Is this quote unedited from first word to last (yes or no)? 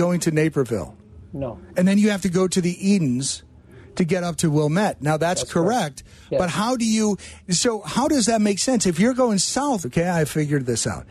no